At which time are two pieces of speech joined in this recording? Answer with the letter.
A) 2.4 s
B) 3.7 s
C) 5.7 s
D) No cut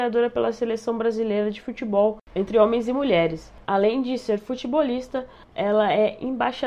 B